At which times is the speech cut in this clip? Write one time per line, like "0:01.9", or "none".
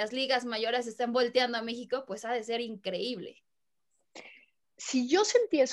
0:04.6